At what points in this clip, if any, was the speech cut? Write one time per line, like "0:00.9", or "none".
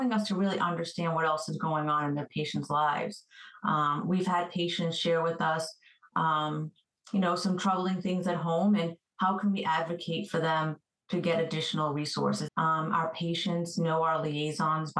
0:12.5

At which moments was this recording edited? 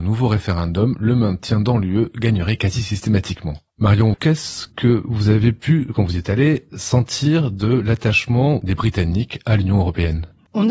0:04.1

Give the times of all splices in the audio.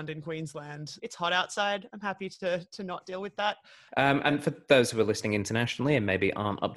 0:01.0
0:03.9

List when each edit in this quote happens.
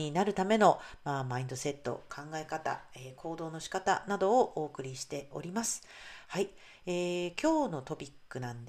none

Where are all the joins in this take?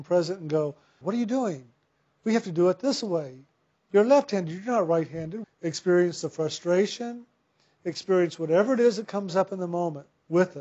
0:01.0
0:05.4

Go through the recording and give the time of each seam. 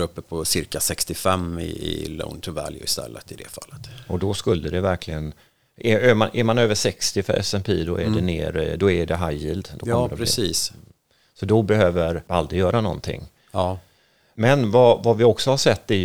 none

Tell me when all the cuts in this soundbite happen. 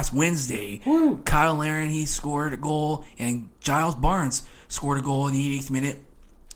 none

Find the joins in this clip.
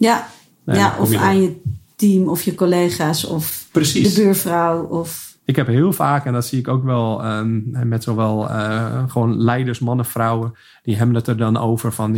none

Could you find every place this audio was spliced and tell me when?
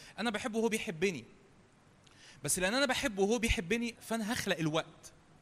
0:03.9

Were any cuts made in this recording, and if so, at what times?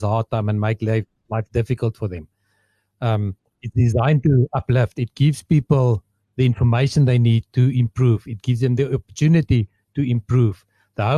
none

